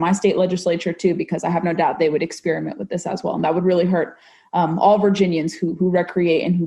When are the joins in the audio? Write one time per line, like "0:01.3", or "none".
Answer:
none